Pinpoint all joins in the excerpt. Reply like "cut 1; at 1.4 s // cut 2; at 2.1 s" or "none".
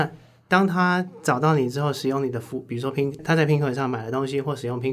cut 1; at 3.2 s